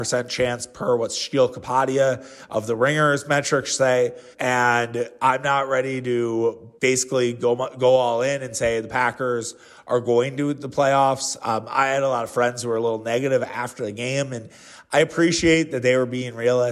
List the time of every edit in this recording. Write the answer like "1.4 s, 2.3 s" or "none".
4.3 s, 6.8 s